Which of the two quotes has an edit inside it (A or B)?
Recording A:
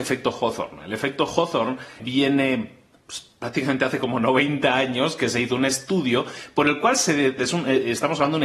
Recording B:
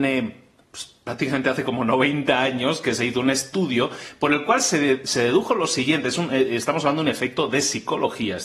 A